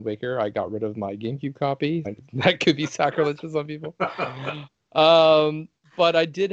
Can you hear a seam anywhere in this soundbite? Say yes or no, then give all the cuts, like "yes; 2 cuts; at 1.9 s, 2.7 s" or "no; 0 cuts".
yes; 1 cut; at 2.0 s